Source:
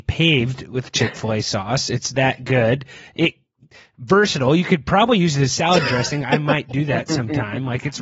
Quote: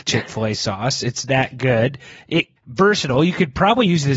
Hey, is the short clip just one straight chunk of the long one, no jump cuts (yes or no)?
no